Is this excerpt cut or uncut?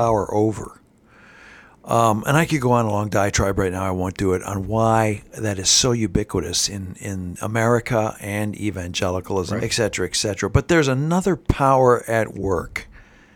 cut